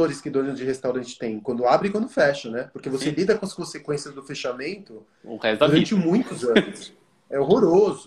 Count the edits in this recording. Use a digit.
0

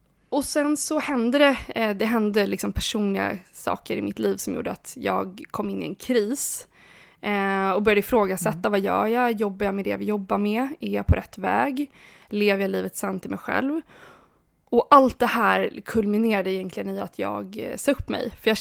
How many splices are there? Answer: 0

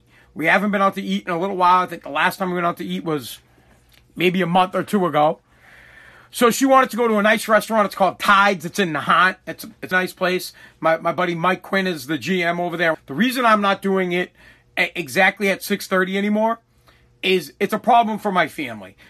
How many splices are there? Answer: 2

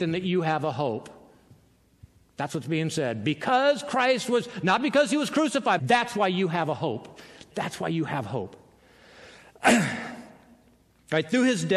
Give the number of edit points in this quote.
1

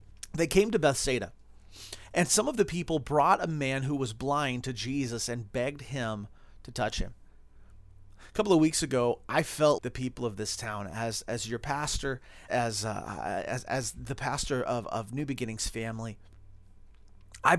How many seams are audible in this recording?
2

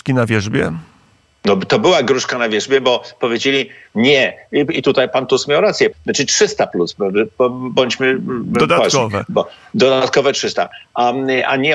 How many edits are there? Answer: 1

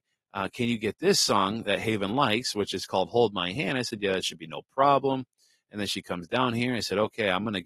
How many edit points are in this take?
0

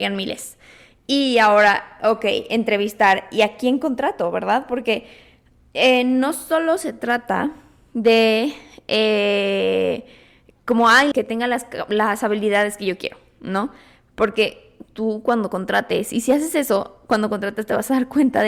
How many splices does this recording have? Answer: 1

